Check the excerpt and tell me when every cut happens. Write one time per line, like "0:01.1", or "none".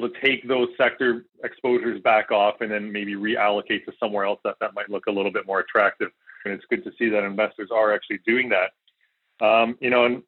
0:06.5